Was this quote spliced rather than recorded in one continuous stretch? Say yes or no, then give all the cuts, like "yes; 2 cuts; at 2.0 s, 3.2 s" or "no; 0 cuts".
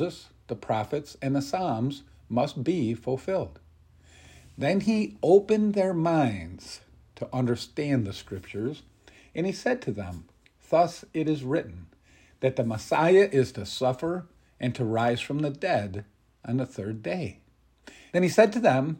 yes; 1 cut; at 18.1 s